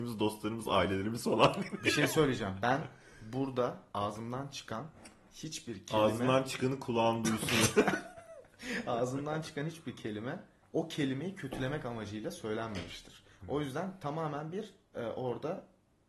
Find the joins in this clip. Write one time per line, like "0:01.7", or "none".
none